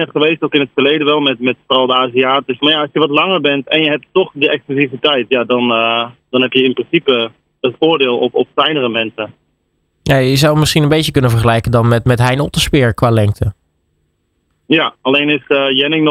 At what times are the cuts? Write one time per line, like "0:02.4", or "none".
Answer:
0:02.6